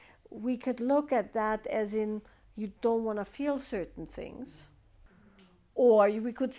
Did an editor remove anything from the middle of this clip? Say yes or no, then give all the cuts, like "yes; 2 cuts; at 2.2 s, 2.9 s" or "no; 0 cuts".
no; 0 cuts